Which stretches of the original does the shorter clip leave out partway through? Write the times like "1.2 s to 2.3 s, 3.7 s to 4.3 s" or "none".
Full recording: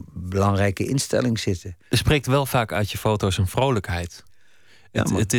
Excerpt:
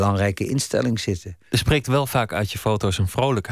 none